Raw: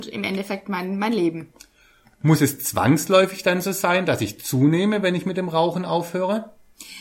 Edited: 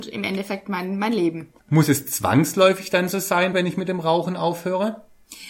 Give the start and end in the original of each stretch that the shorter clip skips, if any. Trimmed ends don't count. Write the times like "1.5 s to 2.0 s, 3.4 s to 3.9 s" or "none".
1.6 s to 2.1 s, 4.1 s to 5.0 s